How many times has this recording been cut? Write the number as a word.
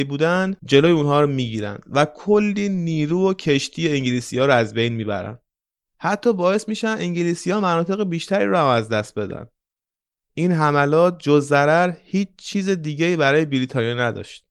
zero